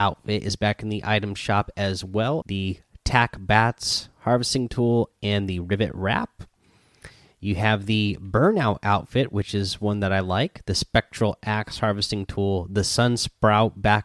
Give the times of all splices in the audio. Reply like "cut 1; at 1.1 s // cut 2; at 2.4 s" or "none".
cut 1; at 2.4 s